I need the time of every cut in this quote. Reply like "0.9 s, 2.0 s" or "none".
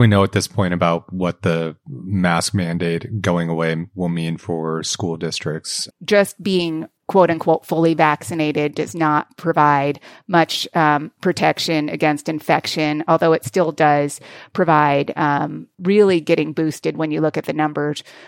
5.9 s, 15.8 s